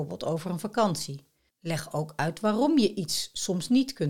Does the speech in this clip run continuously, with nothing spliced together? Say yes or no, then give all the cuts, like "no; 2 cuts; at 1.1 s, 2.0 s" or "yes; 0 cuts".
no; 1 cut; at 1.5 s